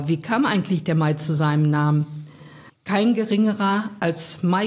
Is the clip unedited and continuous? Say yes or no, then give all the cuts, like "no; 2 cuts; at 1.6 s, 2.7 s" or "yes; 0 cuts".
no; 1 cut; at 2.7 s